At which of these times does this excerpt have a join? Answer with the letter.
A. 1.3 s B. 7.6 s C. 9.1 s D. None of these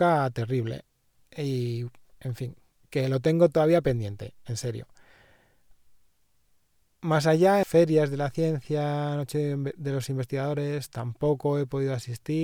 B